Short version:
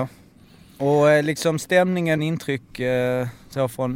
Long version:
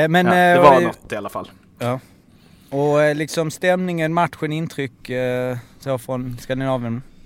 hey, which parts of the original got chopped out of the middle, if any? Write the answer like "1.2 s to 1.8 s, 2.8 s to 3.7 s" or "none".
4.1 s to 4.5 s